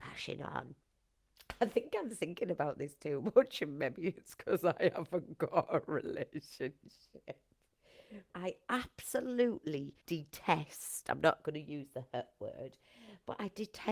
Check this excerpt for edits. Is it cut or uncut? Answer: cut